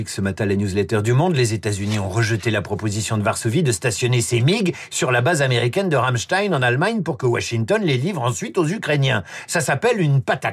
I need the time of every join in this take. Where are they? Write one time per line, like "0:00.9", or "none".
none